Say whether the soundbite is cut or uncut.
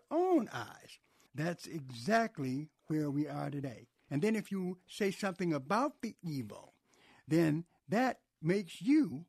cut